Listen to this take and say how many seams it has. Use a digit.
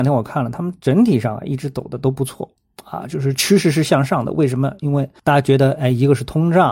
1